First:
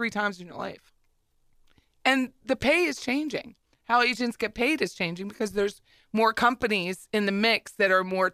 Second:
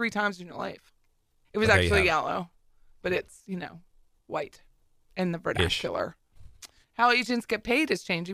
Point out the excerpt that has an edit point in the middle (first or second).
second